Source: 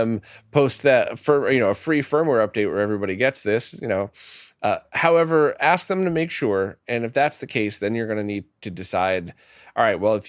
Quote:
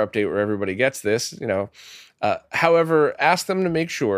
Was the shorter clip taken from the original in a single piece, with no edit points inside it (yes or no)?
yes